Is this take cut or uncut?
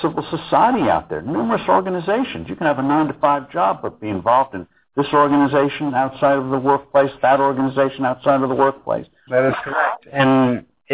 cut